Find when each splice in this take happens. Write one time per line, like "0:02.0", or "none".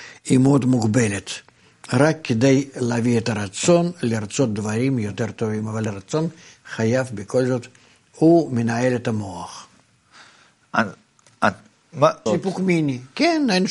0:12.3